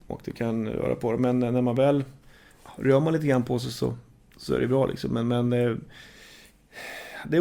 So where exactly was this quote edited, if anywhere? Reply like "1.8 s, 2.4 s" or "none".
none